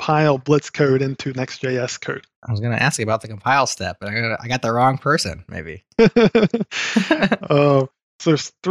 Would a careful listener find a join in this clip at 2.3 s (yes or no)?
yes